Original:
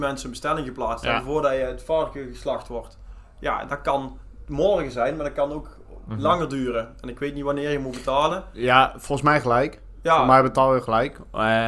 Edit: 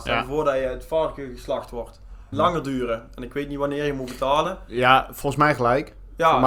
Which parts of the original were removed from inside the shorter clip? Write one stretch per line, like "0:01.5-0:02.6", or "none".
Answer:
0:03.3-0:06.2